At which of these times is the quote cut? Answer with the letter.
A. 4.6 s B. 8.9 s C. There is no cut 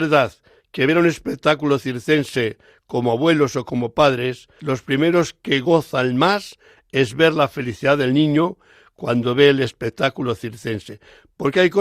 A